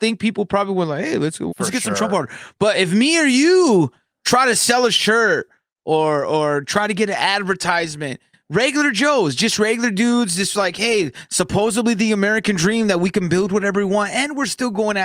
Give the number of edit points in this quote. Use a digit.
1